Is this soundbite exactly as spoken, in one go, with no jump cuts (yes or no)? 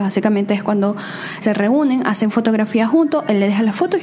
no